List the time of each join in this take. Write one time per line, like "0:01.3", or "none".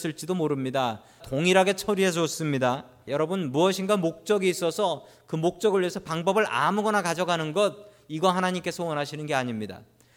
0:01.2
0:03.1